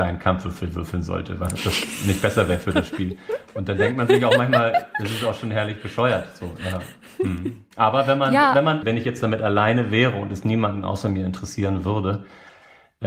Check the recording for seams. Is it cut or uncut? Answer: cut